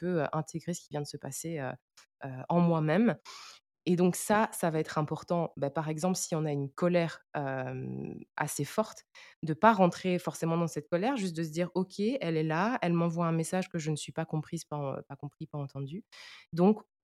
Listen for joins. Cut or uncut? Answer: uncut